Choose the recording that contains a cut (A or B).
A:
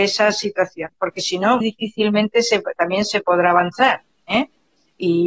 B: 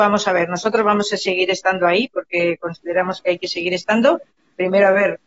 A